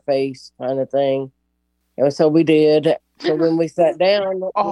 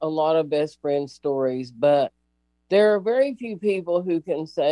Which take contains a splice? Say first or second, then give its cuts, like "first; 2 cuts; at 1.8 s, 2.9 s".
first; 2 cuts; at 1.8 s, 3.0 s